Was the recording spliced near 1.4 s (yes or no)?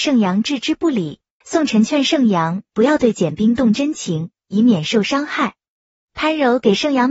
yes